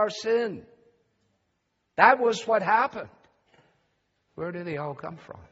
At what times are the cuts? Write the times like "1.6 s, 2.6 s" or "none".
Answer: 4.3 s